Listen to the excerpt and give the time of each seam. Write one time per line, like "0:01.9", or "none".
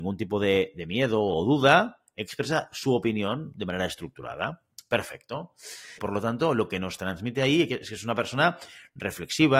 0:06.0